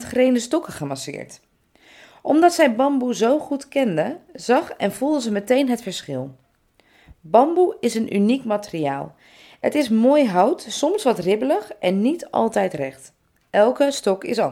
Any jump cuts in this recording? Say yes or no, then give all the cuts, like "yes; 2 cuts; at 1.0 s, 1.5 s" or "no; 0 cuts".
no; 0 cuts